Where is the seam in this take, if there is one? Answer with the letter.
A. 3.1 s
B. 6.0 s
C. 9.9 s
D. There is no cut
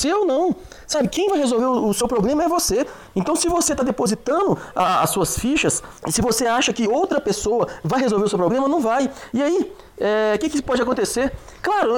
B